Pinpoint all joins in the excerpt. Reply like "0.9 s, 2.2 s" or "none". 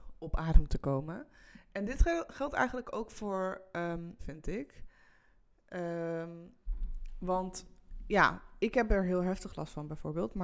4.2 s